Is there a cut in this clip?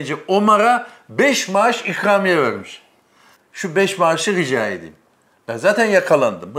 yes; 1 cut; at 3.4 s

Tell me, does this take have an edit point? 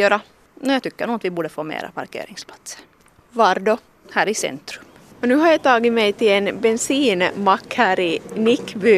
no; 0 cuts

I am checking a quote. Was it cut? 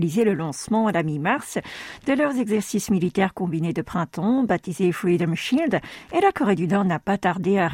no; 0 cuts

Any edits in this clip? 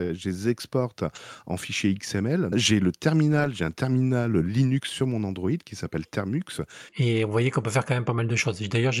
yes; 2 cuts; at 2.5 s, 6.9 s

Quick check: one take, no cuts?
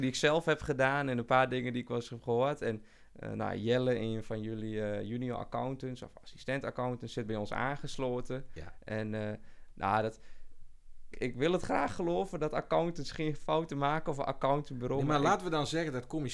no; 1 cut; at 11.1 s

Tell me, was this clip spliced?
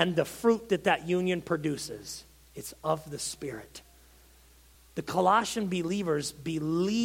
no; 0 cuts

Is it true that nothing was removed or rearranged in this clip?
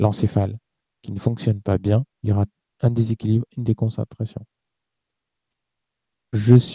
no; 1 cut; at 2.1 s

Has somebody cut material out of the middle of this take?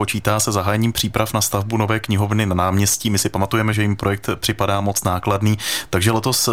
yes; 1 cut; at 3.7 s

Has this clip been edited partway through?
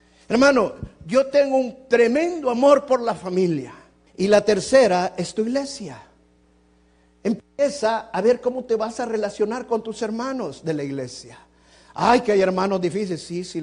yes; 1 cut; at 4.1 s

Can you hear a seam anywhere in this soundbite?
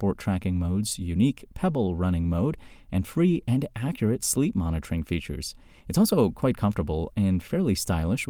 no; 0 cuts

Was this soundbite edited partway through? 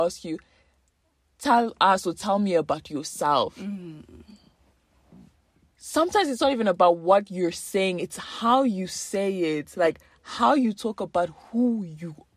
no; 0 cuts

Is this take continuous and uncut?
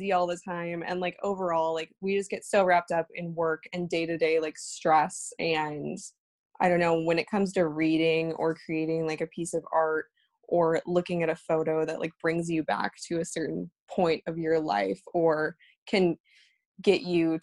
yes; 0 cuts

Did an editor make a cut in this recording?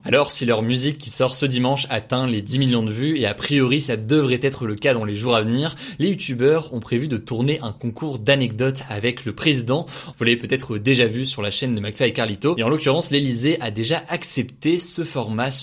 yes; 1 cut; at 10.1 s

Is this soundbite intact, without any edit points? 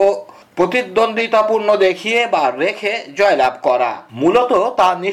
no; 1 cut; at 4.1 s

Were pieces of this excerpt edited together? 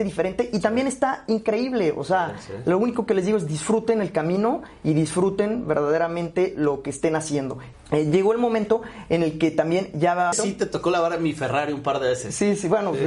yes; 2 cuts; at 7.7 s, 10.3 s

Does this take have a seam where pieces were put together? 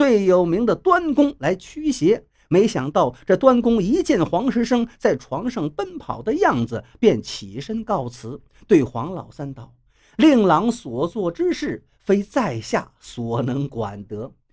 no; 0 cuts

